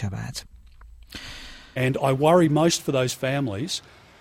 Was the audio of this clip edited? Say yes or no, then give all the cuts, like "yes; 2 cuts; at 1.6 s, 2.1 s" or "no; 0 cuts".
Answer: yes; 1 cut; at 1.8 s